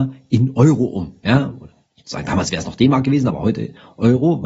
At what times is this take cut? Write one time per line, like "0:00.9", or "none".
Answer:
none